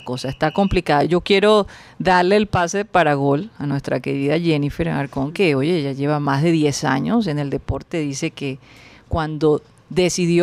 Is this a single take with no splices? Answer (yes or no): yes